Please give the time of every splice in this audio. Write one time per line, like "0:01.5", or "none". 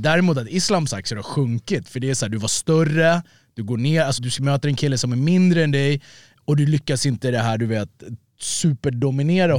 0:04.2